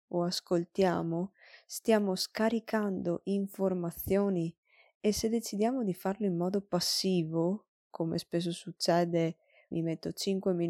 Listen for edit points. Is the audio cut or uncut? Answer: cut